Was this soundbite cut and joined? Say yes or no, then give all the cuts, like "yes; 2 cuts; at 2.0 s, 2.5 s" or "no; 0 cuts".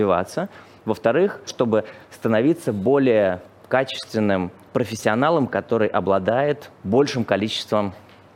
yes; 1 cut; at 1.5 s